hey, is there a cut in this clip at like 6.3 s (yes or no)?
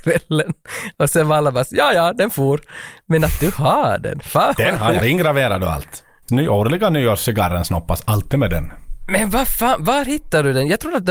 yes